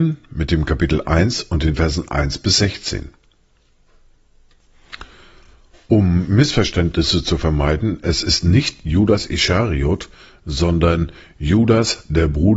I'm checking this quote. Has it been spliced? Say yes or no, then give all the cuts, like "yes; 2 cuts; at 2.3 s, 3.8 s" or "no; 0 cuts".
no; 0 cuts